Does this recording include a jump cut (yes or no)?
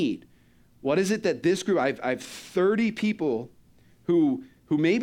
no